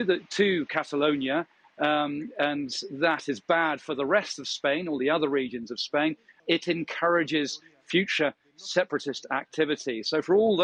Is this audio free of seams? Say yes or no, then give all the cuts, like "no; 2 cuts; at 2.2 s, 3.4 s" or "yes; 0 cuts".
no; 1 cut; at 6.4 s